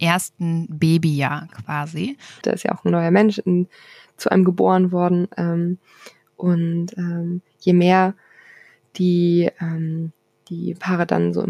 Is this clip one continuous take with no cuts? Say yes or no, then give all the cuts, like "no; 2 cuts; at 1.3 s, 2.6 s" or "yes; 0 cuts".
no; 1 cut; at 2.4 s